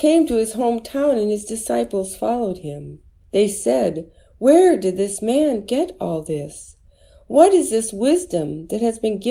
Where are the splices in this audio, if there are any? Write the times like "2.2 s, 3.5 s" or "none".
3.2 s